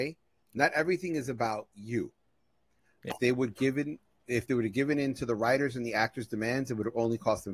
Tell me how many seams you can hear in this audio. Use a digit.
1